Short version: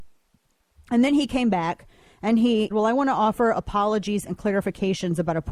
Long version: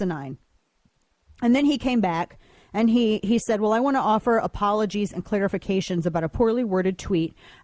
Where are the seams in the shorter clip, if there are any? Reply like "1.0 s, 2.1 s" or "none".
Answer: 2.7 s